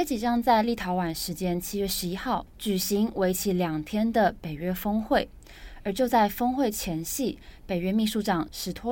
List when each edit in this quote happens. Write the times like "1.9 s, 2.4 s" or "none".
none